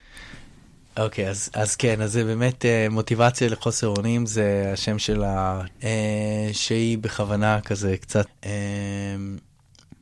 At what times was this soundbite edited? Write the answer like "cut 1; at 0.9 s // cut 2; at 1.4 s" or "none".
cut 1; at 5.7 s // cut 2; at 8.3 s